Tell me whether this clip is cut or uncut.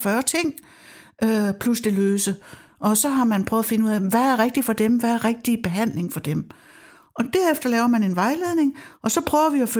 cut